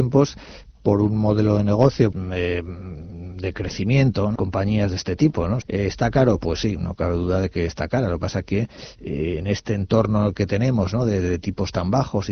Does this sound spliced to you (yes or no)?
yes